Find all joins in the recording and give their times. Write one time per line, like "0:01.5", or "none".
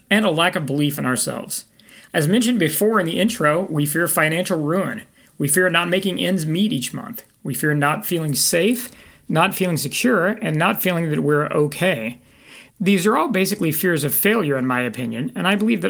0:02.1